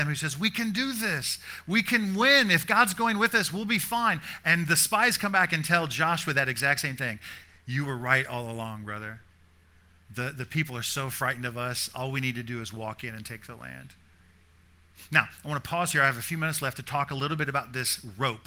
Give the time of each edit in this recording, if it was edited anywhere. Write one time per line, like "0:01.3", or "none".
none